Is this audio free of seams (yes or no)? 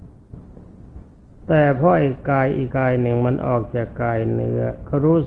no